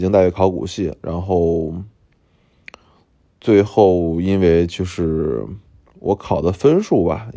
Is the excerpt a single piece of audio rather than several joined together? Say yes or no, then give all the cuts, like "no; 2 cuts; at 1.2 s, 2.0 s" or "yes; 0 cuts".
no; 1 cut; at 1.0 s